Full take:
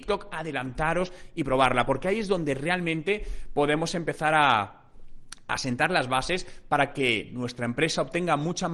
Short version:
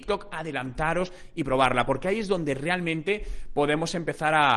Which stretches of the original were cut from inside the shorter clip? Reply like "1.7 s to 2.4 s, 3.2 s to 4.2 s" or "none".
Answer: none